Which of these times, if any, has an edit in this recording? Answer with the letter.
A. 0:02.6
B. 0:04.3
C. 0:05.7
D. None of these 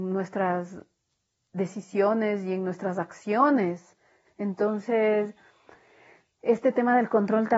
B